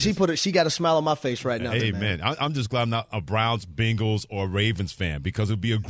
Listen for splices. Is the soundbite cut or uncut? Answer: cut